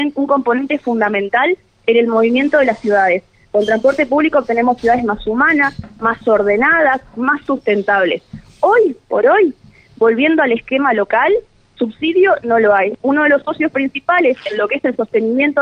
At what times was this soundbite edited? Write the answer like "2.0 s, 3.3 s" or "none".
none